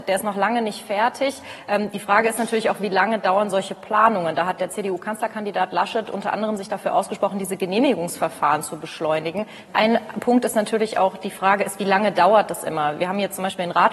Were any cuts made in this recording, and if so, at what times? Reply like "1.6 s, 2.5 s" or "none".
9.7 s